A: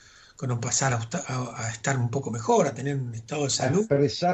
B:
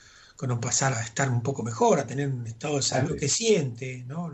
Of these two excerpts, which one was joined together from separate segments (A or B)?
B